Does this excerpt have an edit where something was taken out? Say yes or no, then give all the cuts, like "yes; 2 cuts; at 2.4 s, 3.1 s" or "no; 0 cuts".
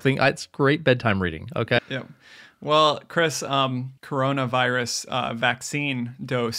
yes; 2 cuts; at 1.8 s, 4.0 s